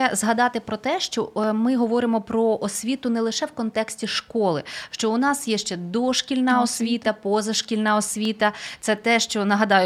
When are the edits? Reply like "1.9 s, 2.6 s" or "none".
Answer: none